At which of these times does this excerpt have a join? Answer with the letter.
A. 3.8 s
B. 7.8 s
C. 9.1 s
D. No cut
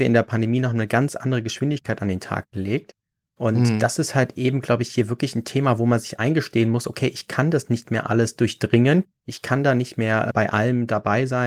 D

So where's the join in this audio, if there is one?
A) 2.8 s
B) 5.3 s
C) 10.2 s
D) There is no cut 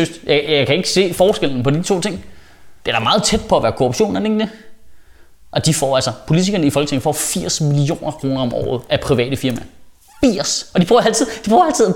A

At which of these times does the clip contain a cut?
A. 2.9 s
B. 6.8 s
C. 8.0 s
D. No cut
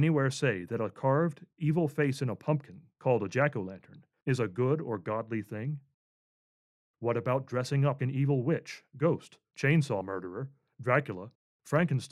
C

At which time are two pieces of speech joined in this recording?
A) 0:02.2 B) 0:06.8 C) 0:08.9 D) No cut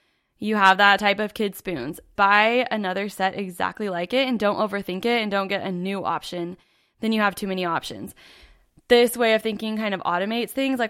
A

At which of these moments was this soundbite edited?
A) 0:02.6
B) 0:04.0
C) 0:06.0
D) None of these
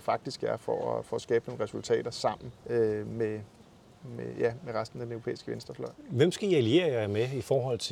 A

